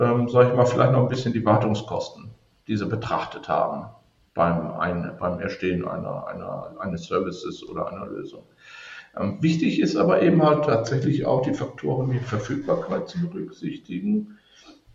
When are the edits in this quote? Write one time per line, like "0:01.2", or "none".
0:05.2